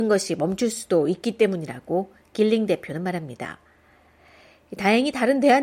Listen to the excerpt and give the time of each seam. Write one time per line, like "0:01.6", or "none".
none